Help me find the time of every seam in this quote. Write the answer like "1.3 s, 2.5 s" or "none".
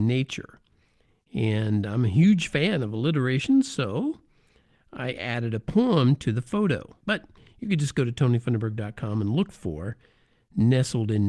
7.0 s